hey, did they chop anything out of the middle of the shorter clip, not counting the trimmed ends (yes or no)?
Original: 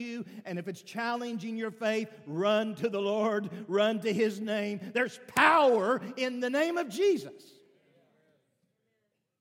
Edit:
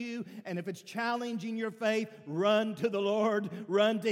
no